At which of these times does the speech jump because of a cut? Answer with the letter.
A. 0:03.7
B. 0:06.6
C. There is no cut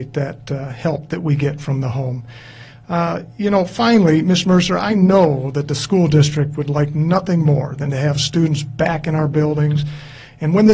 C